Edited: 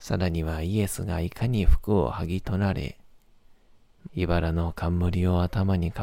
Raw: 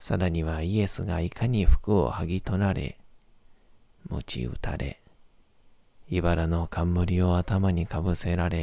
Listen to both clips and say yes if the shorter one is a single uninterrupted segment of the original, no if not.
no